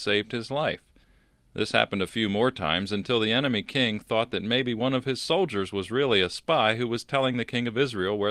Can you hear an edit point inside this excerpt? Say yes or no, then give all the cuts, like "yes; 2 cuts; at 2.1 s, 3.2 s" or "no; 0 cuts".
no; 0 cuts